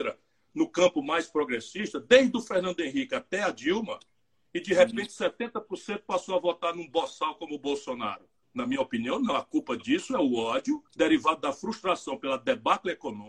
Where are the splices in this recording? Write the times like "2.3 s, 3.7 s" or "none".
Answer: 8.4 s, 10.9 s